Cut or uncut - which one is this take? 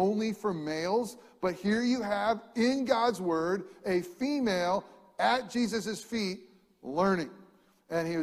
uncut